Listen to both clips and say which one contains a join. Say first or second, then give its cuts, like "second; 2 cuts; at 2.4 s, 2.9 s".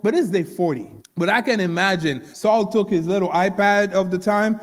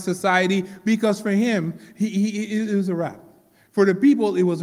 first; 2 cuts; at 1.0 s, 2.3 s